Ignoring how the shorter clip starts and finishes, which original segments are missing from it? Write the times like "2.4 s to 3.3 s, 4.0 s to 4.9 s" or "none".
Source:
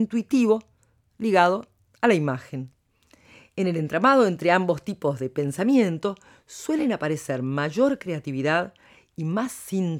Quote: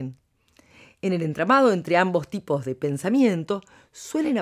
none